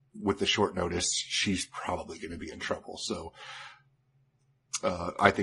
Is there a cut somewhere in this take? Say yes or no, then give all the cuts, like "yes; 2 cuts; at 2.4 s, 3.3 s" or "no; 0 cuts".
no; 0 cuts